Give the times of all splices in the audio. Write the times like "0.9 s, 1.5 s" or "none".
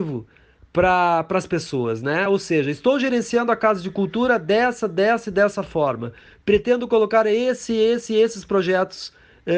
none